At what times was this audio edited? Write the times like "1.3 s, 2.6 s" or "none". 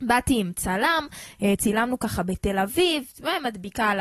1.6 s